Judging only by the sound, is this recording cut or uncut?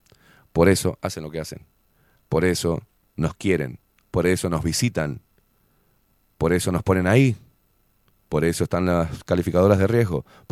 uncut